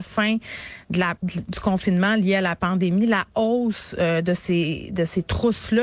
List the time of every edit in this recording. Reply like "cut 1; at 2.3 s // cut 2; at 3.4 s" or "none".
none